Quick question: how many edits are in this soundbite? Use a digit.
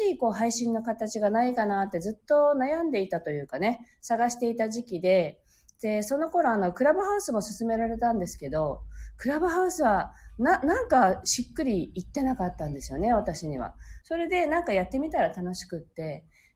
1